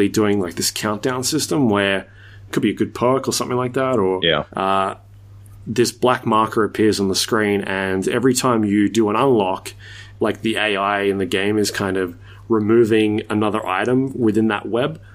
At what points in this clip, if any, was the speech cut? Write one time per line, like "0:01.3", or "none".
0:02.5
0:04.5
0:10.2